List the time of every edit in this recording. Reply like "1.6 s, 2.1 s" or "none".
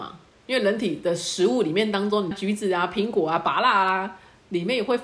2.3 s